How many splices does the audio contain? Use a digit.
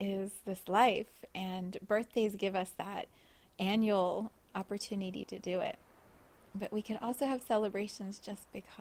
0